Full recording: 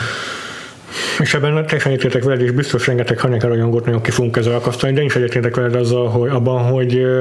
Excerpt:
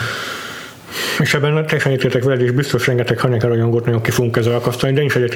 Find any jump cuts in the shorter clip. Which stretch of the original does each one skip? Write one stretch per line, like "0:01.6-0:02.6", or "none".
none